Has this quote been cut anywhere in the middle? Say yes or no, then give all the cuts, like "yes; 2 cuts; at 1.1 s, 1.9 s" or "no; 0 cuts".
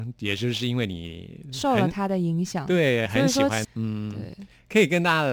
yes; 1 cut; at 3.6 s